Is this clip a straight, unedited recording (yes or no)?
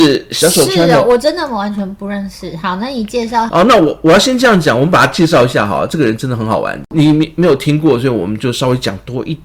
no